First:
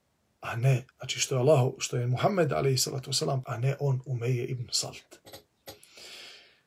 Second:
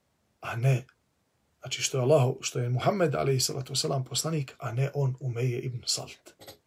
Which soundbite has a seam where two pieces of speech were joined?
first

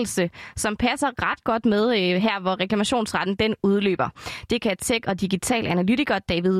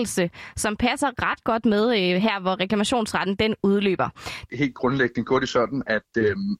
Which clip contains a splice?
second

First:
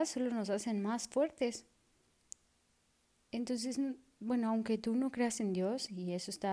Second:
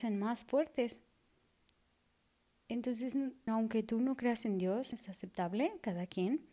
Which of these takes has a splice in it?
second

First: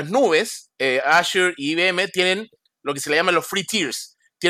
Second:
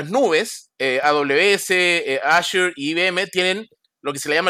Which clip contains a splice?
first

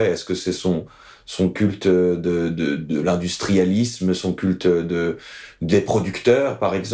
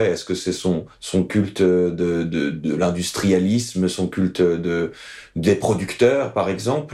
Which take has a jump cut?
second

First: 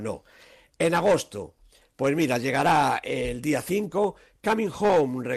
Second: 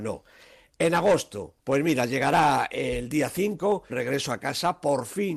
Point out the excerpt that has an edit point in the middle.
second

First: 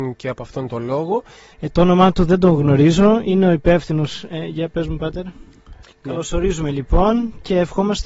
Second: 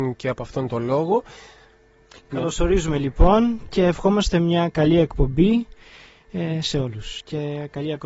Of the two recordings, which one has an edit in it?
first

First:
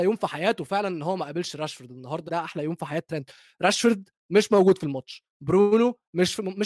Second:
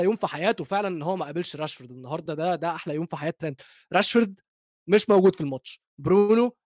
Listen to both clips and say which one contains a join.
first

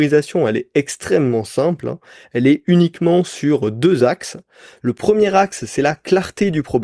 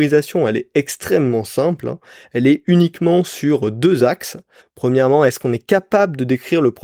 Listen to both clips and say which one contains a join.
second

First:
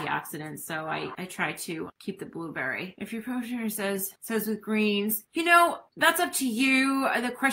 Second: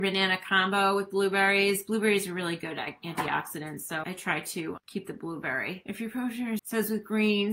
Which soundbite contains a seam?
second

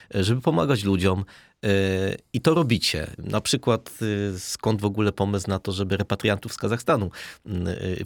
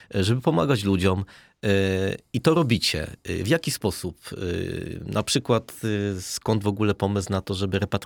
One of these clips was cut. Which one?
first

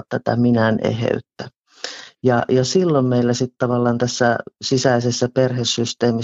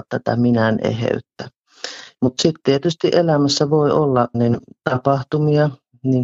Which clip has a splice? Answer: second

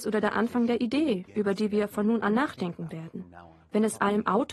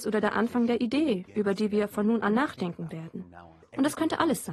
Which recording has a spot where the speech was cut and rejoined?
second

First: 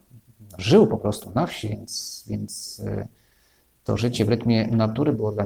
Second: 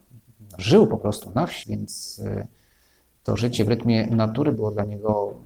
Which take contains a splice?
second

